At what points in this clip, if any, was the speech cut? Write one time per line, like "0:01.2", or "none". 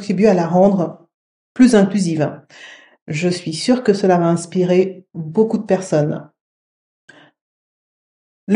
none